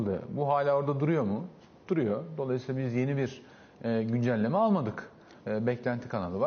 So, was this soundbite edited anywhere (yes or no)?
yes